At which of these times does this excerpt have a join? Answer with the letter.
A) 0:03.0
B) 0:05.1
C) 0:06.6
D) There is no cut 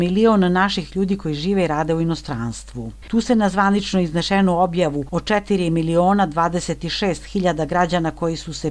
A